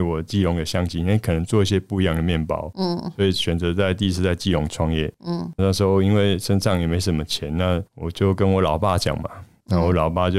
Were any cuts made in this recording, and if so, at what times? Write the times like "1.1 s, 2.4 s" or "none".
5.6 s, 7.9 s